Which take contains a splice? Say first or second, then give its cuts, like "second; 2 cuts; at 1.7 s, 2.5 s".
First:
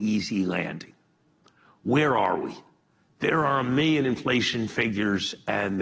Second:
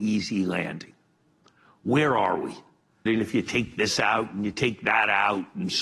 second; 1 cut; at 3.1 s